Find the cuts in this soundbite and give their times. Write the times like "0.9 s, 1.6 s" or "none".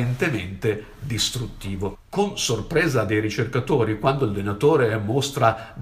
1.9 s